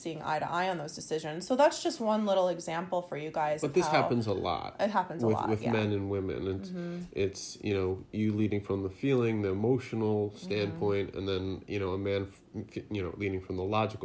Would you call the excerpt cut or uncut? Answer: uncut